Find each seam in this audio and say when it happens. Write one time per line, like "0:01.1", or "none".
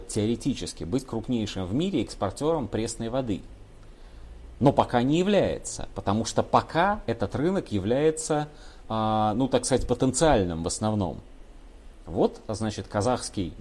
none